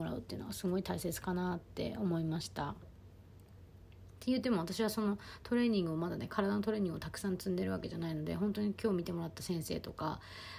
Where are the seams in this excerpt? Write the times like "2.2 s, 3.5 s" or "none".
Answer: 2.8 s